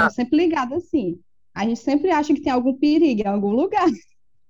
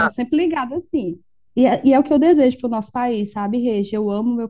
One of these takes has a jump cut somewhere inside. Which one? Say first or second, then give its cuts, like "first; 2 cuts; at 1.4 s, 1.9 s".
second; 1 cut; at 1.5 s